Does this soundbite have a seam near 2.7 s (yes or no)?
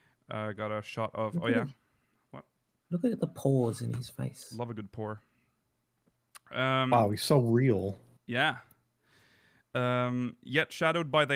no